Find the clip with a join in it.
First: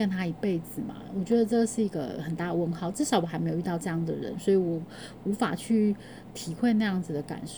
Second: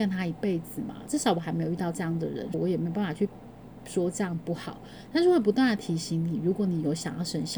second; 3 cuts; at 1.1 s, 2.5 s, 5.1 s

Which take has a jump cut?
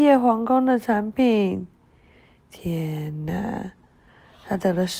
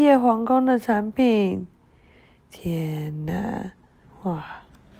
second; 1 cut; at 4.0 s

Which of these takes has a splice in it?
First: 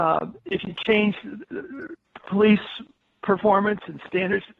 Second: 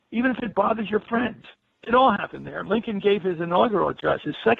second; 1 cut; at 1.7 s

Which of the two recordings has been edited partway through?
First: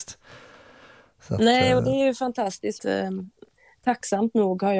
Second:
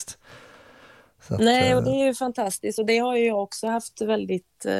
first; 1 cut; at 2.8 s

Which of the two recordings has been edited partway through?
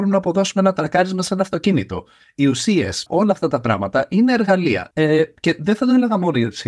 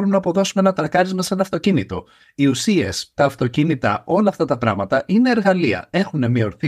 first; 2 cuts; at 3.1 s, 4.9 s

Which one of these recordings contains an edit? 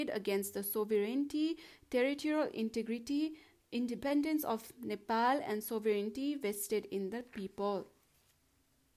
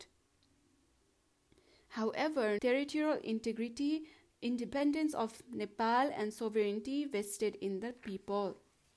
second; 1 cut; at 2.6 s

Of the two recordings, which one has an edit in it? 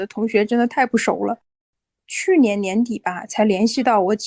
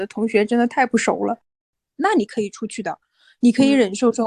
second; 1 cut; at 1.9 s

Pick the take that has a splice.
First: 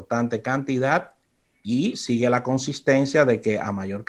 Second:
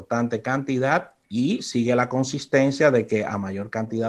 second; 1 cut; at 1.2 s

